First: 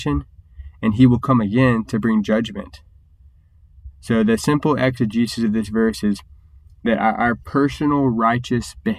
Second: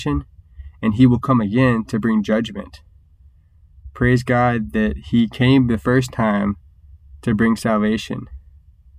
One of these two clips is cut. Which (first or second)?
first